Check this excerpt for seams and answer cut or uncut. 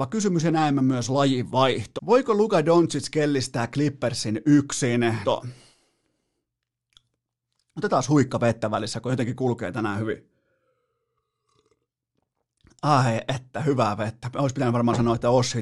cut